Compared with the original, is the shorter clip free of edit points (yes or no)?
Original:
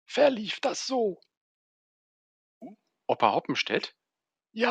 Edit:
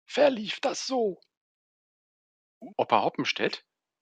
no